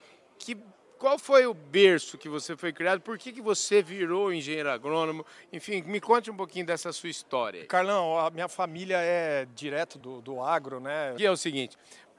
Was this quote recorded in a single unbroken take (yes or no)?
no